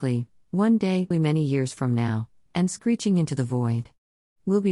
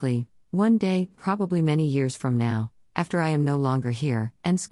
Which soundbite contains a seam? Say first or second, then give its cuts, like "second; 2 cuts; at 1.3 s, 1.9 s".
first; 2 cuts; at 1.1 s, 2.5 s